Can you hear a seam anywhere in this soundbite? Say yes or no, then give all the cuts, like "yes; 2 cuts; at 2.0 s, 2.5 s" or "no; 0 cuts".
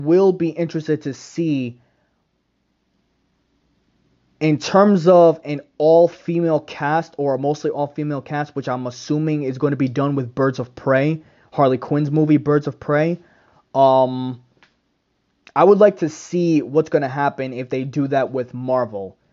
no; 0 cuts